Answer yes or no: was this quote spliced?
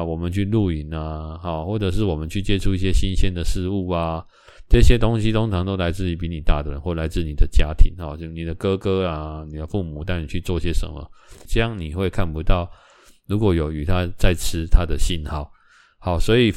yes